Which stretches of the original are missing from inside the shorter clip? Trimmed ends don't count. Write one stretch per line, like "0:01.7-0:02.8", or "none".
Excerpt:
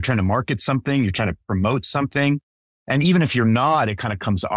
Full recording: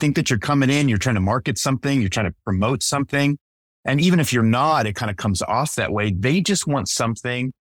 none